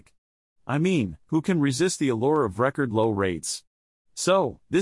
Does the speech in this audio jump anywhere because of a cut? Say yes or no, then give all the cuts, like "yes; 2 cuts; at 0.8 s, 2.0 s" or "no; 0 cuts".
no; 0 cuts